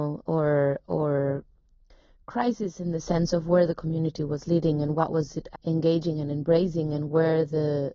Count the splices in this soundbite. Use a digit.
1